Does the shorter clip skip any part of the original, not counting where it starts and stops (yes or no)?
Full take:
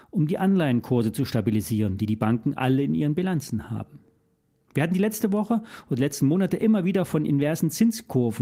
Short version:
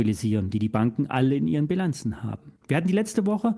yes